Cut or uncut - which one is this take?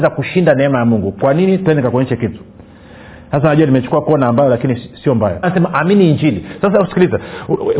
cut